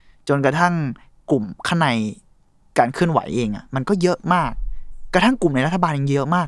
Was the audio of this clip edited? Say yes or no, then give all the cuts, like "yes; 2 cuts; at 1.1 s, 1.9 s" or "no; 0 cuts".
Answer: no; 0 cuts